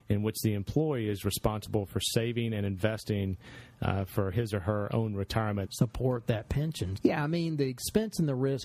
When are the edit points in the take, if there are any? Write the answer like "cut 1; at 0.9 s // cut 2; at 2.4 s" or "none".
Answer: cut 1; at 5.6 s // cut 2; at 7.0 s

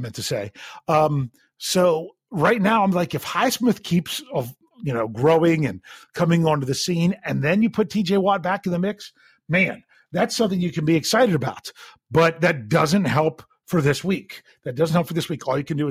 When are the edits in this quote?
none

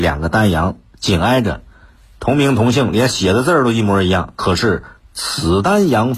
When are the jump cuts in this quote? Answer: none

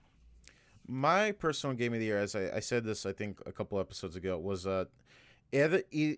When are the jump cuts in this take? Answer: none

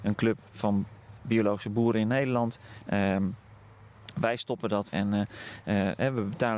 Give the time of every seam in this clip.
cut 1; at 2.8 s // cut 2; at 4.9 s

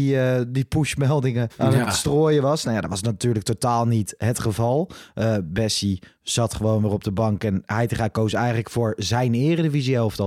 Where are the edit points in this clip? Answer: cut 1; at 1.5 s

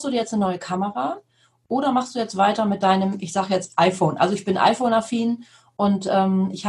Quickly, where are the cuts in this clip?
none

